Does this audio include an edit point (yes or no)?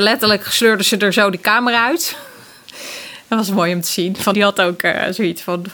yes